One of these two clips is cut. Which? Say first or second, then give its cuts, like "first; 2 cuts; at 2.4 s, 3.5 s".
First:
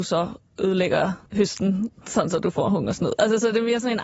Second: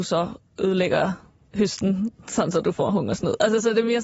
first; 1 cut; at 1.3 s